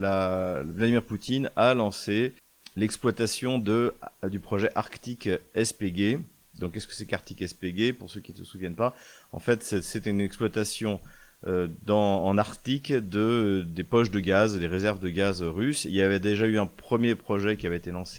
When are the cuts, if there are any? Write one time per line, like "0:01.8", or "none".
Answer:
none